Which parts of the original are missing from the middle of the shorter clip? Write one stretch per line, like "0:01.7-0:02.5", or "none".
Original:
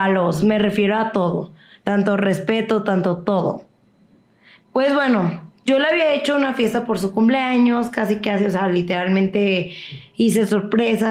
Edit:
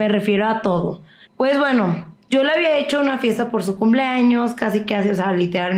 0:01.8-0:04.6

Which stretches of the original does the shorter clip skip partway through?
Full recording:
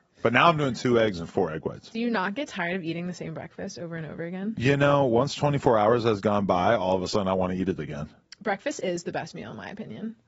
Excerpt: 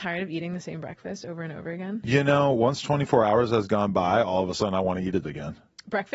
none

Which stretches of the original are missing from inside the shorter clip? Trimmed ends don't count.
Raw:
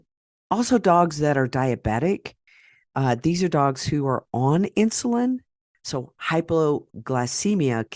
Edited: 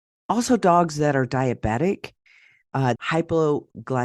0:03.2-0:06.1

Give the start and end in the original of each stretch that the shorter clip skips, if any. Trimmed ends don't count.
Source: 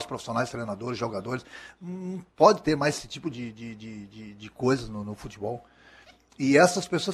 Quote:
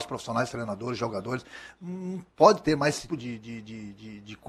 0:03.1-0:03.2

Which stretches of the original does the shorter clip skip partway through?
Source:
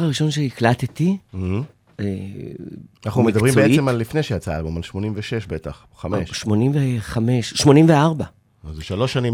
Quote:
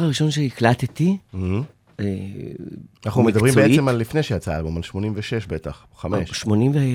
none

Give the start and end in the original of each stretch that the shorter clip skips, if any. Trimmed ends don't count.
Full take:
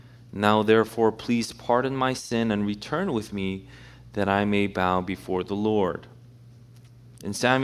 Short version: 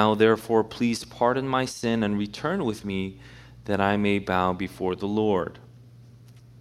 none

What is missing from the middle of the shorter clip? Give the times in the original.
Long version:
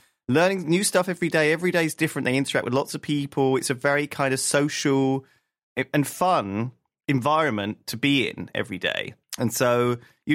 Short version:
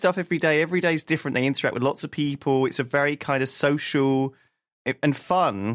none

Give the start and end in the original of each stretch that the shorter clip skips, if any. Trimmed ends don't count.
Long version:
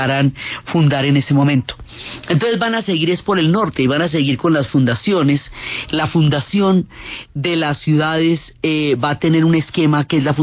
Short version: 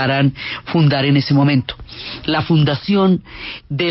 0:02.2-0:05.9

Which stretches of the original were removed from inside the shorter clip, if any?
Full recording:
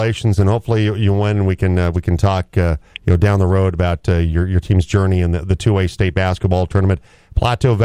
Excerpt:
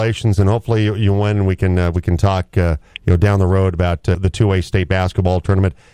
0:04.1-0:05.4

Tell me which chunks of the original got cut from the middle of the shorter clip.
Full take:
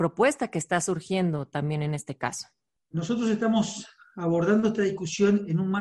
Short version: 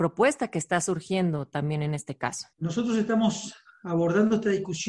0:02.5-0:02.9

